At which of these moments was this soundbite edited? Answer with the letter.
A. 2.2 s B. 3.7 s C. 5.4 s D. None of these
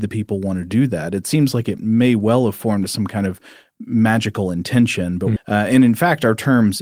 C